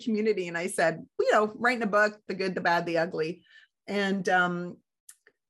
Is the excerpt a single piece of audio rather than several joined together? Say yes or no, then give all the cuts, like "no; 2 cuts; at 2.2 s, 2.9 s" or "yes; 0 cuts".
no; 2 cuts; at 1.2 s, 2.3 s